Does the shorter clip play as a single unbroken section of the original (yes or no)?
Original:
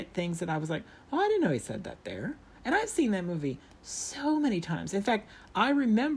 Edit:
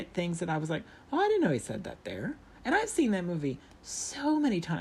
yes